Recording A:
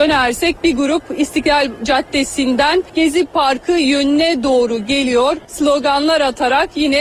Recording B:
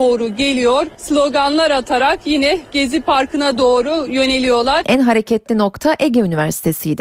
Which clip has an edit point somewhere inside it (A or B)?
B